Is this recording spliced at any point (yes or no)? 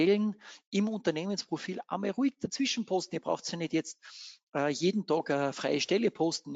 no